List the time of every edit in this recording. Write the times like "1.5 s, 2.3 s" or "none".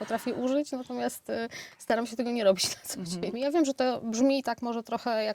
3.3 s